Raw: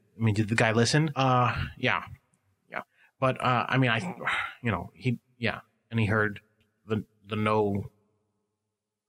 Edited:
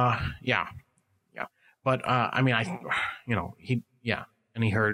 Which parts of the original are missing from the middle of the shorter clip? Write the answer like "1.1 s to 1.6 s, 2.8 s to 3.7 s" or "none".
none